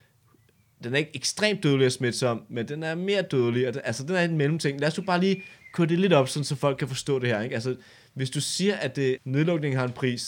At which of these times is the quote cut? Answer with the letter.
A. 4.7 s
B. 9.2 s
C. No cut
B